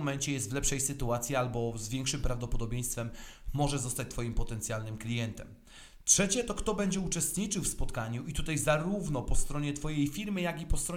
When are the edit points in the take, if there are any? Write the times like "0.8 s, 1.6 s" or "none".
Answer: none